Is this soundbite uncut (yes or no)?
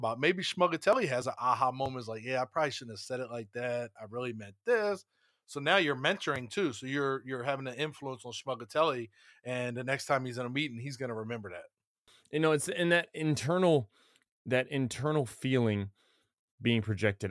yes